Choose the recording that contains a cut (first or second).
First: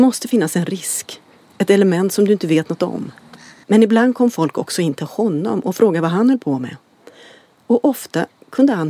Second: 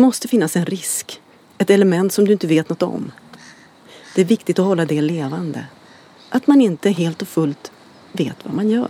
first